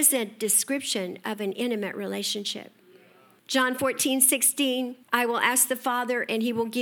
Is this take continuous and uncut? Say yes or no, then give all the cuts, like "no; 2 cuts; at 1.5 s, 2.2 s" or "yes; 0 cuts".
no; 2 cuts; at 3.4 s, 5.0 s